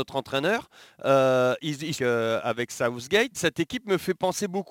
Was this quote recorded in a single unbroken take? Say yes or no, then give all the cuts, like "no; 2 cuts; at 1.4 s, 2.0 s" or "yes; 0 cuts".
no; 2 cuts; at 2.0 s, 3.3 s